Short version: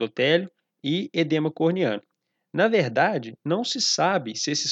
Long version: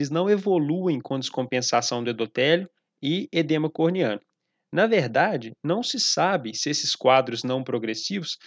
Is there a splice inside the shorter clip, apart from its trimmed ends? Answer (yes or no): no